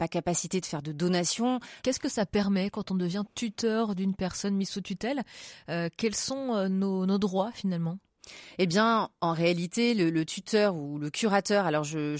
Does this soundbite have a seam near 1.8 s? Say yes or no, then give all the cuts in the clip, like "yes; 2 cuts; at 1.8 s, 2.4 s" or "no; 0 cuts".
yes; 1 cut; at 1.8 s